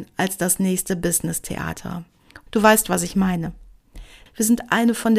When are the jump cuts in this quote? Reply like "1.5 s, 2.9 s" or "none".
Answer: 2.5 s, 4.3 s